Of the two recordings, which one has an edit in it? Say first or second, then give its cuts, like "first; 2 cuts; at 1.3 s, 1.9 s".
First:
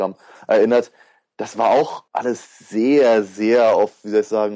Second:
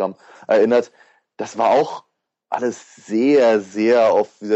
first; 1 cut; at 2.1 s